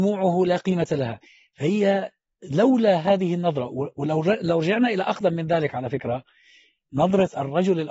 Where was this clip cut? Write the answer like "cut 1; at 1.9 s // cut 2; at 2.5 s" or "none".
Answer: none